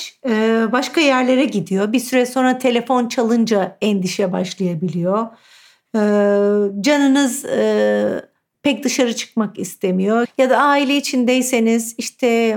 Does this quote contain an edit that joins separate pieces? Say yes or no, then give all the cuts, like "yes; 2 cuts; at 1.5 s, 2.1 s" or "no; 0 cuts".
yes; 1 cut; at 10.2 s